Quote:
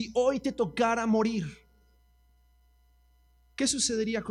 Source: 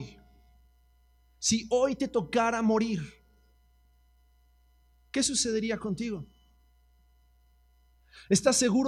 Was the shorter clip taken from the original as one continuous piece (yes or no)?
yes